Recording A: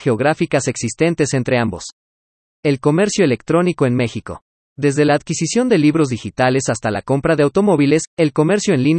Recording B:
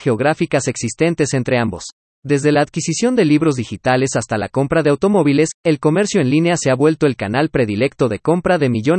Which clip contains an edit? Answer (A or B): B